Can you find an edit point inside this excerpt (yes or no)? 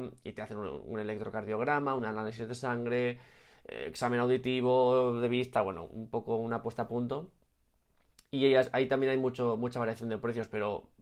no